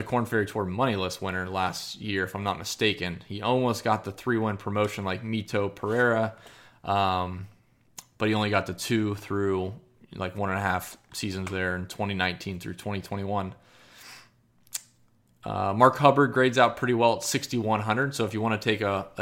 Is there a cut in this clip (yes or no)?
no